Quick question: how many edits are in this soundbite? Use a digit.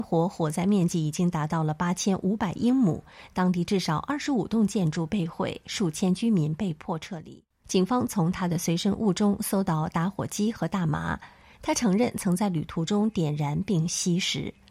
1